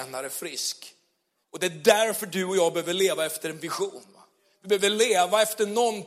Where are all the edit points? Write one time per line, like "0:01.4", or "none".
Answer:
0:01.4